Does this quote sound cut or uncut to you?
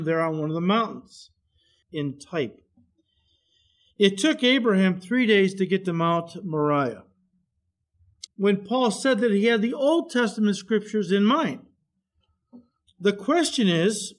cut